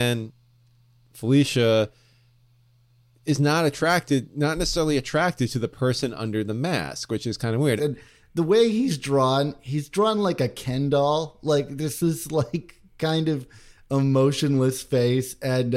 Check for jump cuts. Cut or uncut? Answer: cut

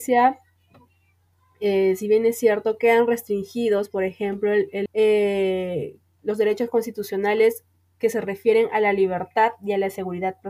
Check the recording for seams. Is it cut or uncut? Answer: cut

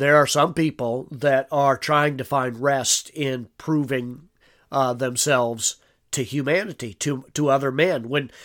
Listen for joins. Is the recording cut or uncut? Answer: uncut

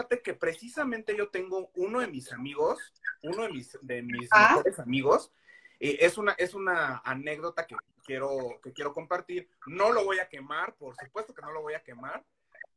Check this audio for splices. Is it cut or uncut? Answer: uncut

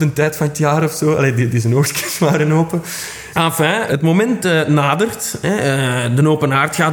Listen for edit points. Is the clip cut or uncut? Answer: uncut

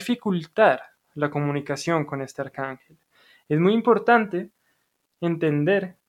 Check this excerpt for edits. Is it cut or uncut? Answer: uncut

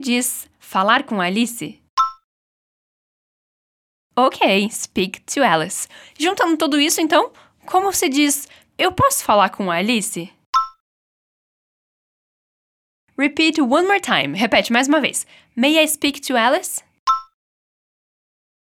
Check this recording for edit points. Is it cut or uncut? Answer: uncut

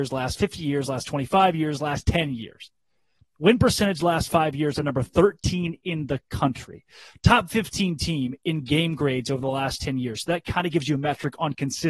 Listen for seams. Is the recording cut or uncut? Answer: uncut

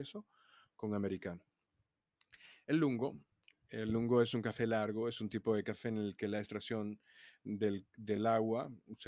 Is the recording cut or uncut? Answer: uncut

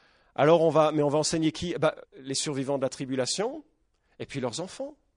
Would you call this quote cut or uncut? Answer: cut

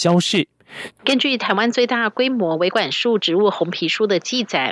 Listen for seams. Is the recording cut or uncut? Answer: cut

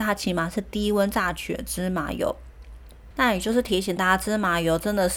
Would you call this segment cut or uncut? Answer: cut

